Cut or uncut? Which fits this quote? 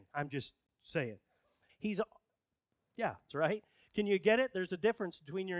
cut